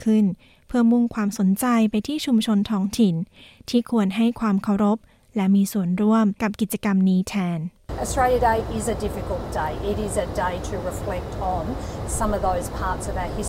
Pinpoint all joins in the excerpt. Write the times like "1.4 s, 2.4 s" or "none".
9.9 s